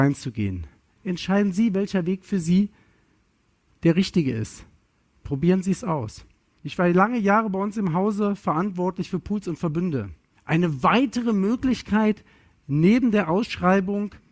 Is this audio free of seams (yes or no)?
no